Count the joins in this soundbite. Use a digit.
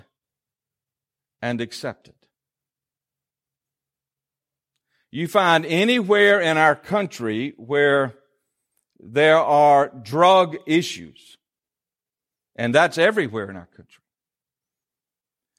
0